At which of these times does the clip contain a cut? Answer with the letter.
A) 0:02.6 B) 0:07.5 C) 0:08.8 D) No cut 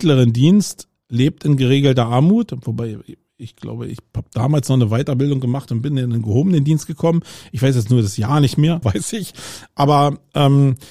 C